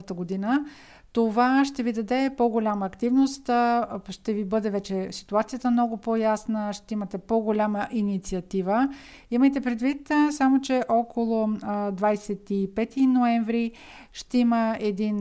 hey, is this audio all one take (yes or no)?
yes